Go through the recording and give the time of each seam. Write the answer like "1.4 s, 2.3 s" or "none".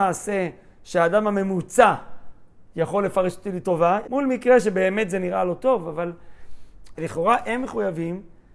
4.0 s, 6.9 s